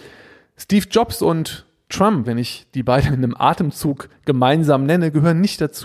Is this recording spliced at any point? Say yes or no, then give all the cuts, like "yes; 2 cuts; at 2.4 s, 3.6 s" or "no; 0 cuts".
yes; 1 cut; at 2.2 s